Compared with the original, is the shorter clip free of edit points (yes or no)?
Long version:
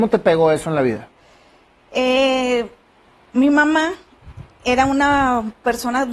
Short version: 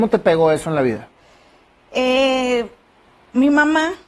yes